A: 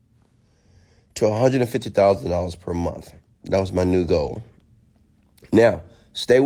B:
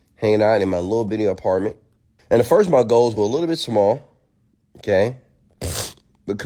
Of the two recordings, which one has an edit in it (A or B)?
B